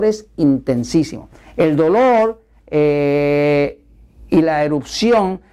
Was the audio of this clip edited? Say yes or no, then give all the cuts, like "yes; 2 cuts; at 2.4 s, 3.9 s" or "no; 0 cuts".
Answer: no; 0 cuts